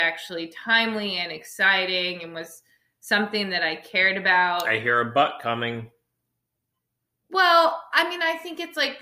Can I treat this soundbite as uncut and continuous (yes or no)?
yes